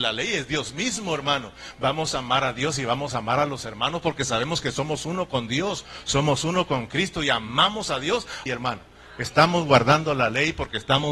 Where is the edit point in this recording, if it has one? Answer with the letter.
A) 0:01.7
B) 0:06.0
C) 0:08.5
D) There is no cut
C